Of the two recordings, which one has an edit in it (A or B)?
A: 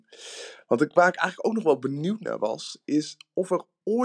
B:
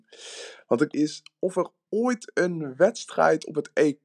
B